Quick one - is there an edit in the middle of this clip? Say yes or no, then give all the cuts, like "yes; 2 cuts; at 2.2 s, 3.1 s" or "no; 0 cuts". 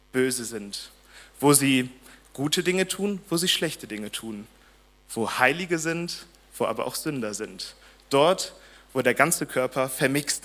no; 0 cuts